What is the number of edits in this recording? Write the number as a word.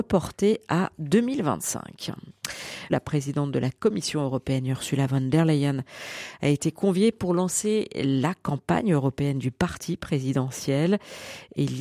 one